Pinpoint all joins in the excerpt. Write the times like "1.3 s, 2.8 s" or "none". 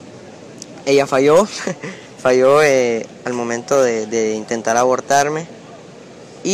none

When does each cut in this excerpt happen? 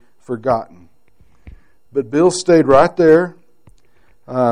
1.9 s

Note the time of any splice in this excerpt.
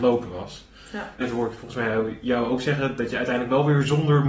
1.2 s

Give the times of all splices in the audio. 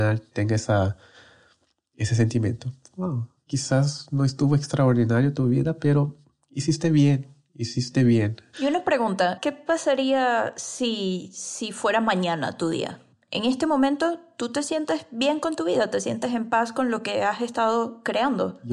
3.4 s, 8.5 s

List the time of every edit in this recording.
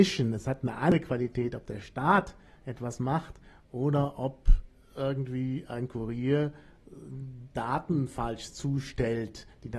none

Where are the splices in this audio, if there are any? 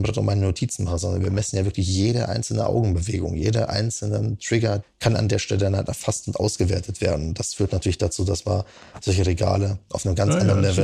4.8 s

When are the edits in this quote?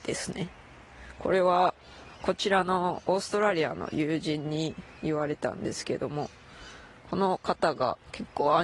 none

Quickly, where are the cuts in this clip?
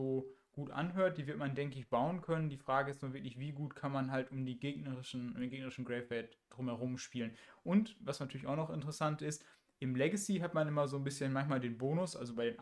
none

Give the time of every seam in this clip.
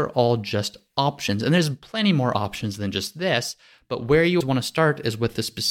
4.4 s

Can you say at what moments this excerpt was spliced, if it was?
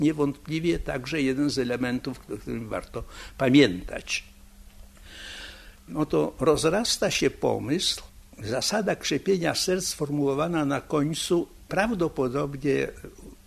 5.9 s

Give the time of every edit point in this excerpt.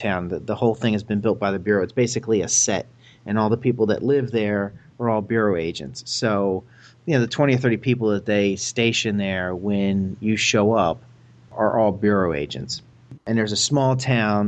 13.2 s

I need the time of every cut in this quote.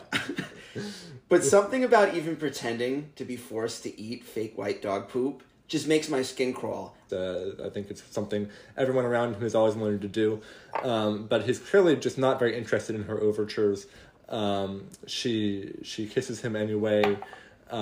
7.1 s

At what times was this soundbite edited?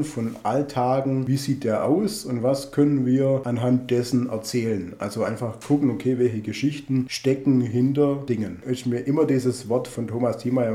none

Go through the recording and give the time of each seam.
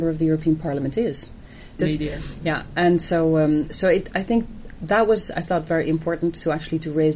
1.8 s

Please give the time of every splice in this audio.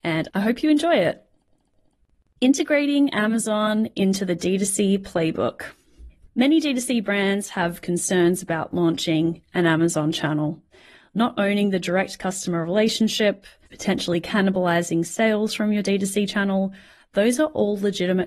6.2 s, 13.7 s

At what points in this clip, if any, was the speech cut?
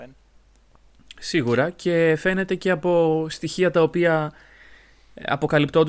none

